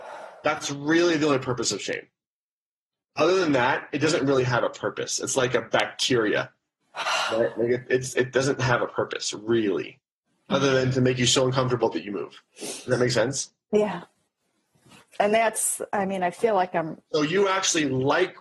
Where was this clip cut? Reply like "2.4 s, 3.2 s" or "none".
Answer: 12.5 s